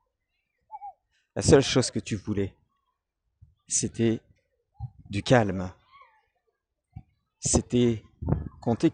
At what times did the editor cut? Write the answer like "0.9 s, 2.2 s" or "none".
none